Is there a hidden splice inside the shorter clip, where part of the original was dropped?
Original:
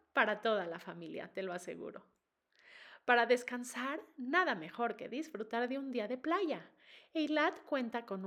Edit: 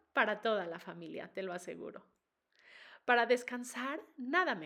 no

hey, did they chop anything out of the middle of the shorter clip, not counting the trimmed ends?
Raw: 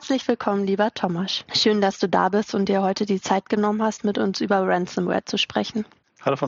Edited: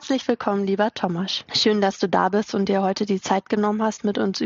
no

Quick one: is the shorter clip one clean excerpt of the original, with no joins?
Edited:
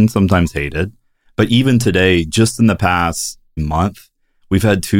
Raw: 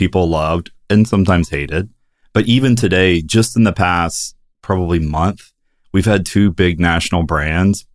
no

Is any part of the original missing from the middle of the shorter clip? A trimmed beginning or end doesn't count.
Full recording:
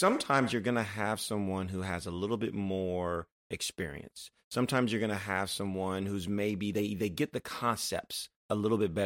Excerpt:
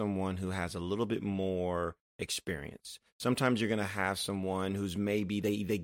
no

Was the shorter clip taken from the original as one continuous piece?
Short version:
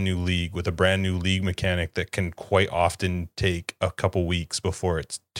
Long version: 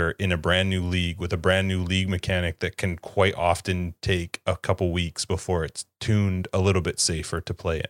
yes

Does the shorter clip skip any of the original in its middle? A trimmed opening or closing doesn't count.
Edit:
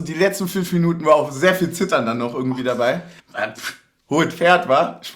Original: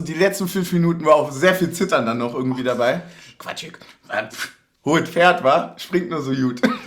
yes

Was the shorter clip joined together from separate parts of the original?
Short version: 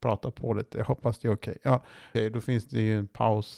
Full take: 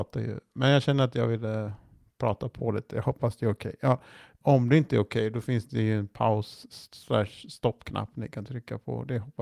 yes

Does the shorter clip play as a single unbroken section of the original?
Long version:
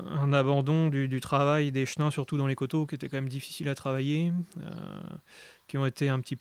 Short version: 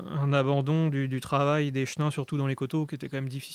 yes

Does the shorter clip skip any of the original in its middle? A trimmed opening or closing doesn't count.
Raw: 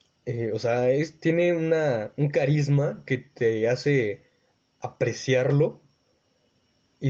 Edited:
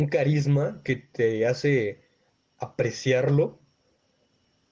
no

